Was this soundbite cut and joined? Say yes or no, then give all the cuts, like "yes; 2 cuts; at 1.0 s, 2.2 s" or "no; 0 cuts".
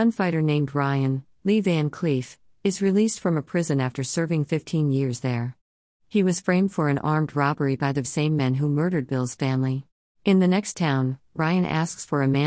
yes; 2 cuts; at 8.0 s, 10.1 s